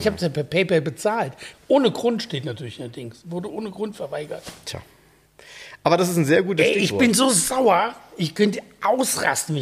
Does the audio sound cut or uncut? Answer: cut